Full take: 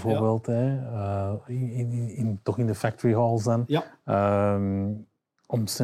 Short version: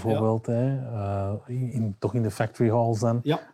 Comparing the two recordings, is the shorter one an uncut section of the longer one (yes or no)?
no